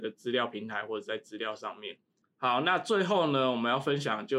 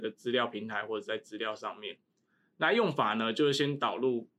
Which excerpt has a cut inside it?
first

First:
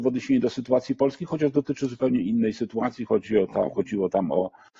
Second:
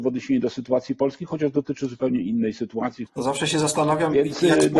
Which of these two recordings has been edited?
second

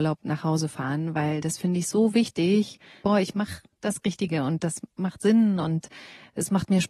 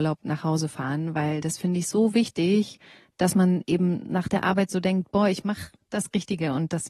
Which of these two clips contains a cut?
first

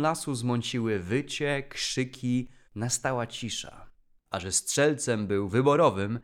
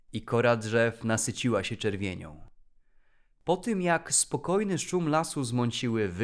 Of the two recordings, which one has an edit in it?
first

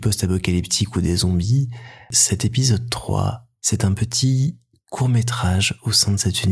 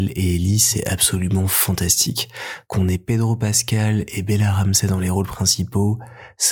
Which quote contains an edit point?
second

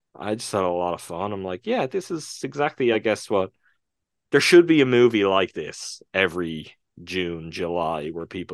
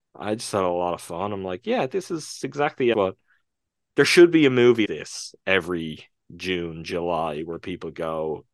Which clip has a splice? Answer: second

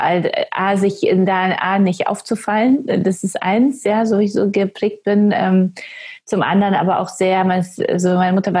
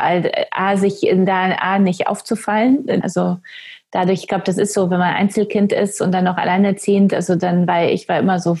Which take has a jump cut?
second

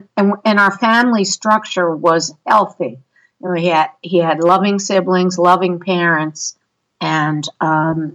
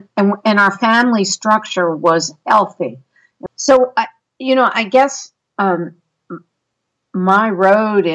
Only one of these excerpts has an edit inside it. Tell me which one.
second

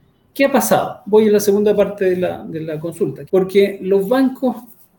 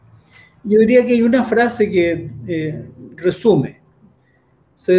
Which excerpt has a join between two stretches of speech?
first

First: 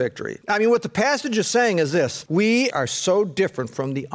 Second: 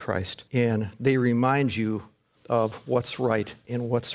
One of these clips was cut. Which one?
first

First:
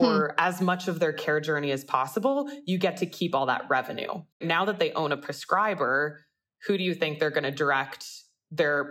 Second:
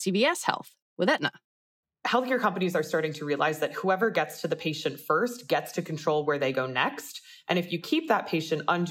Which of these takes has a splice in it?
first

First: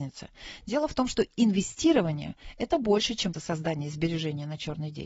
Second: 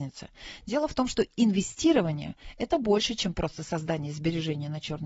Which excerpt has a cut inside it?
first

